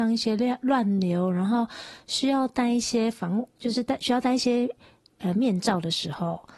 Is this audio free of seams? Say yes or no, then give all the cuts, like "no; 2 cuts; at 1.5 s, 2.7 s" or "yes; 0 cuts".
yes; 0 cuts